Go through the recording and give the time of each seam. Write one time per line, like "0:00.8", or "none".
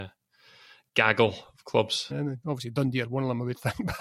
0:02.1